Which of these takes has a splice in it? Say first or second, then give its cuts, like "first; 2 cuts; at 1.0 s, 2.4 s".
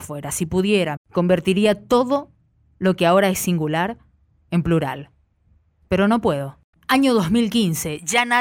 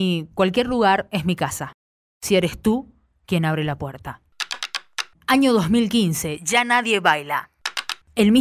first; 2 cuts; at 1.0 s, 6.7 s